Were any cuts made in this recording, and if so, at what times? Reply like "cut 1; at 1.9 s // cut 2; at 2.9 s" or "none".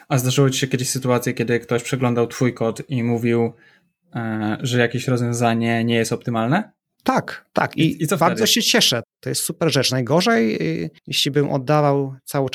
cut 1; at 9.0 s // cut 2; at 11.0 s